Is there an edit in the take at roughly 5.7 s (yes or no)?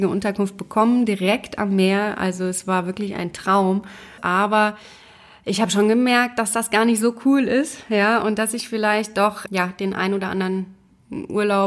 no